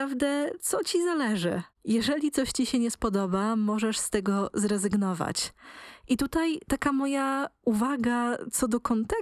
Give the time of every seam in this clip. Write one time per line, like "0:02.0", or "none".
none